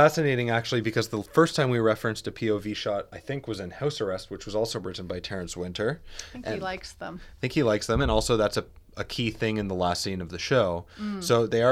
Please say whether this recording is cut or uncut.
uncut